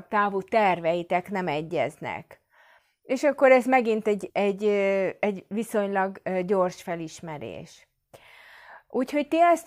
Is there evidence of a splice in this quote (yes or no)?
yes